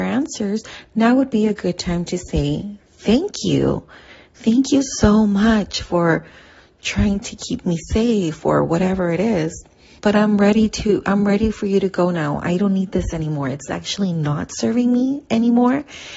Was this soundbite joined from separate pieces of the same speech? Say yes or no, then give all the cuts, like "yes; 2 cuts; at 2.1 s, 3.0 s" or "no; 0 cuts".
no; 0 cuts